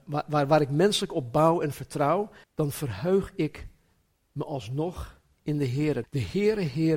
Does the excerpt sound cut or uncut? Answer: cut